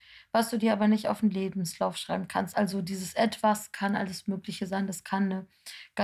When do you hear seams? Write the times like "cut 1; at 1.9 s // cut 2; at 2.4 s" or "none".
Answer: none